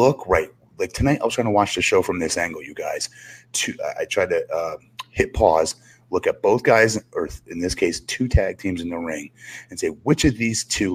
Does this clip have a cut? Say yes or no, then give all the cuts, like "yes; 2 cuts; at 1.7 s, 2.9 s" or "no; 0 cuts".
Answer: no; 0 cuts